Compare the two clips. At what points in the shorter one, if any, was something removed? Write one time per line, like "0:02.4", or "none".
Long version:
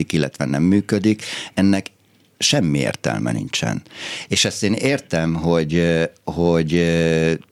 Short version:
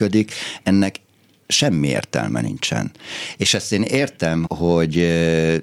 0:04.5